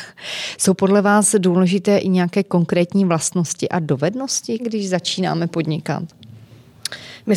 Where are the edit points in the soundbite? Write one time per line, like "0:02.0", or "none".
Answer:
0:04.6